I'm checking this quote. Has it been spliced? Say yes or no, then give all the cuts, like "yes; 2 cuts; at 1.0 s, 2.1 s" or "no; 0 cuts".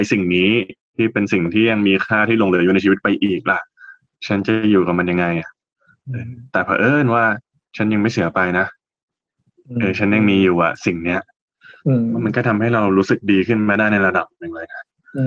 no; 0 cuts